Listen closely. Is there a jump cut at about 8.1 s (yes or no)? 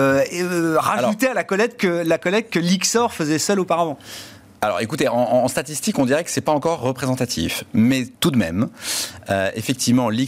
yes